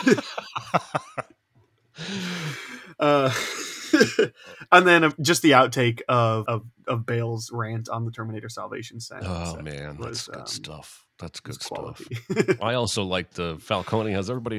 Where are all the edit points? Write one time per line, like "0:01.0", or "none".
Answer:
0:06.5